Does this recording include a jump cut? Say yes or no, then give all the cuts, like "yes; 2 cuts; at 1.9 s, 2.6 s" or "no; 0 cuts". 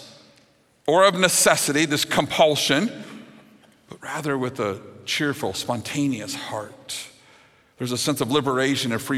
no; 0 cuts